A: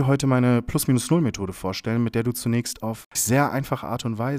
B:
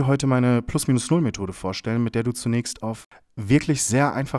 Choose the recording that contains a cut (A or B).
A